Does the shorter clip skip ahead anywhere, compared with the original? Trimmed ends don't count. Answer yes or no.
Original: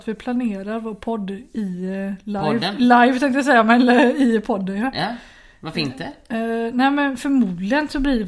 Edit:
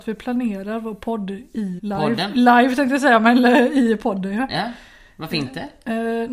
yes